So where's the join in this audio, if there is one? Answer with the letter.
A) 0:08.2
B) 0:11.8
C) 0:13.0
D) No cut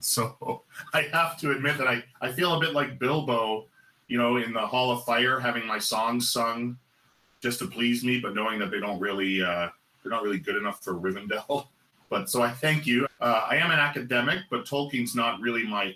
C